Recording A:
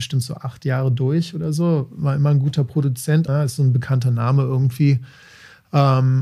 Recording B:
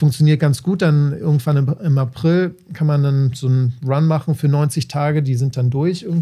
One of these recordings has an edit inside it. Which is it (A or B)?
A